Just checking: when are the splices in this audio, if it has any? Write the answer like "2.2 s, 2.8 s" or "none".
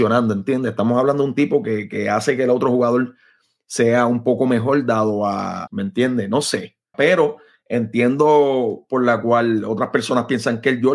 5.7 s, 6.9 s